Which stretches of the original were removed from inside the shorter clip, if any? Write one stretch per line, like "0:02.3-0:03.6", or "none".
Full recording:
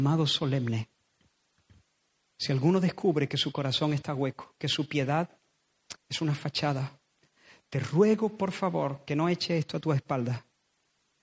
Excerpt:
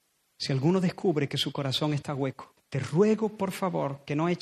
0:04.6-0:07.6